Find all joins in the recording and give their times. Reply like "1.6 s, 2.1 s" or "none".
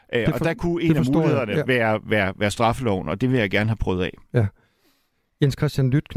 none